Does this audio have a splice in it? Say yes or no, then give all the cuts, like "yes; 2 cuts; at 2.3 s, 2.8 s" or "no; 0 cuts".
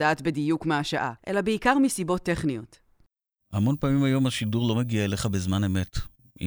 yes; 1 cut; at 1.2 s